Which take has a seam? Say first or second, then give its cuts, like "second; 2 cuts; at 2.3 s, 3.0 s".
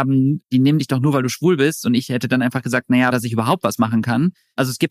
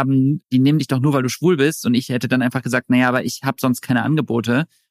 first; 1 cut; at 3.1 s